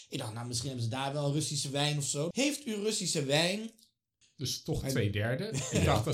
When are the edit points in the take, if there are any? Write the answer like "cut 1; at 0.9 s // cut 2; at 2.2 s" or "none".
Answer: cut 1; at 2.3 s // cut 2; at 4.2 s